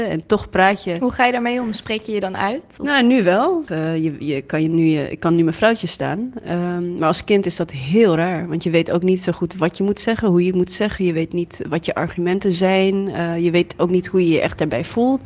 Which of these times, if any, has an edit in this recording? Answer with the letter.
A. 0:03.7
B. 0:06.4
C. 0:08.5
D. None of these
A